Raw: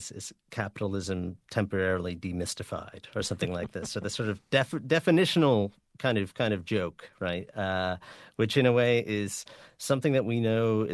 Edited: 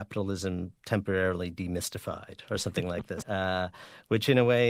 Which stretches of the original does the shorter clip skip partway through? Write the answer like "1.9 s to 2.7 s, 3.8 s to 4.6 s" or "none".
3.9 s to 7.5 s